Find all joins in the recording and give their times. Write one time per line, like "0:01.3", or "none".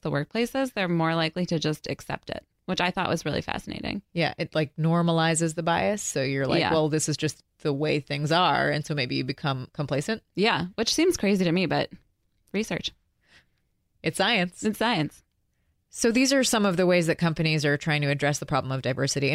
none